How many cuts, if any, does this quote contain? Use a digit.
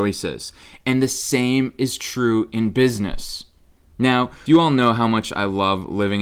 1